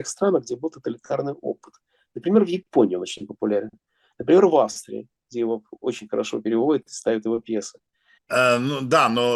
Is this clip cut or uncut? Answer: cut